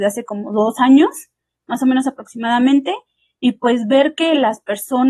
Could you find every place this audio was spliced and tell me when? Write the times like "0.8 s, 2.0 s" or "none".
none